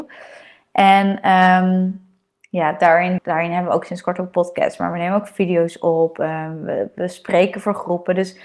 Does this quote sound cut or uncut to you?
cut